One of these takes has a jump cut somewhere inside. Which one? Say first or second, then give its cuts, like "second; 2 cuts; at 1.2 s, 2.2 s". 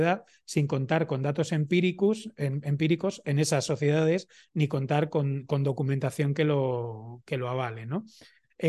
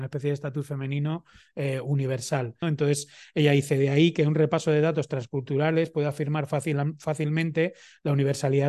second; 1 cut; at 2.6 s